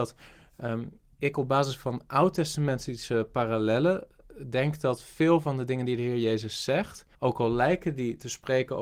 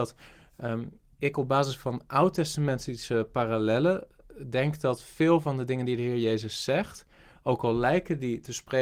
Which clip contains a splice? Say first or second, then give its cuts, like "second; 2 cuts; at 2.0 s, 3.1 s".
first; 1 cut; at 7.1 s